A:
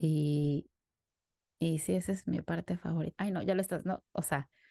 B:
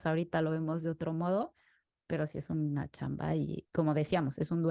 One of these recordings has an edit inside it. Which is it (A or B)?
A